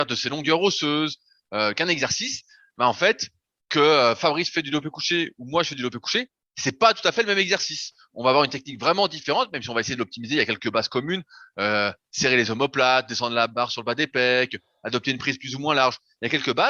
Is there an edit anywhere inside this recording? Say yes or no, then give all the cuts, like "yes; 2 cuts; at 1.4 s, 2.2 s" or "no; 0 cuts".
no; 0 cuts